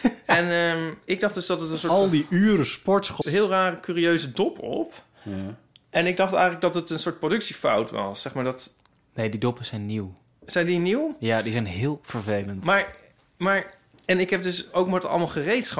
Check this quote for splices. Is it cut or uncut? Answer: cut